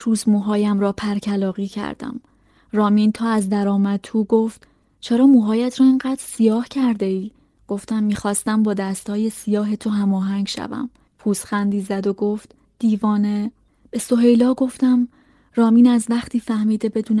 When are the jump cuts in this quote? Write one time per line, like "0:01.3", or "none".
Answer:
none